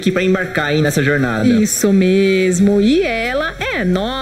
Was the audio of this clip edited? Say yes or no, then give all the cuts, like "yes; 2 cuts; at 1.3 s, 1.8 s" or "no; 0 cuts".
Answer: no; 0 cuts